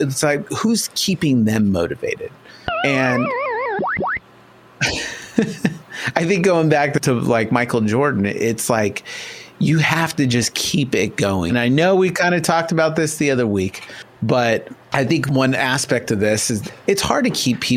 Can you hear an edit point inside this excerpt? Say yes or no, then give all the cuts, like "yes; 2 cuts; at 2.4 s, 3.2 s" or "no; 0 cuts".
yes; 1 cut; at 11.5 s